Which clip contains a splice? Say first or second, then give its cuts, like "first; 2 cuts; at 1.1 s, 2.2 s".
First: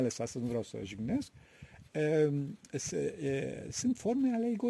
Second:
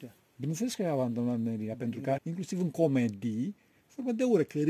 second; 1 cut; at 2.2 s